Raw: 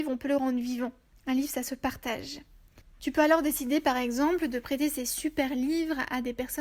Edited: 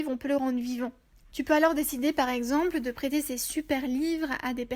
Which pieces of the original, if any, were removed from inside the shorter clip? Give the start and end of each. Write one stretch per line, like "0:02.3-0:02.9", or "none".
0:01.2-0:02.9